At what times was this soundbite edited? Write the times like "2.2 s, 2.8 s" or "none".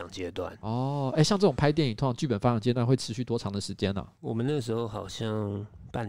none